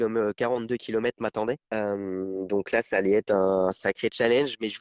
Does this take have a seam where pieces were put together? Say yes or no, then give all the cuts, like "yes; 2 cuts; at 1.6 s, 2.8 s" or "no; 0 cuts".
no; 0 cuts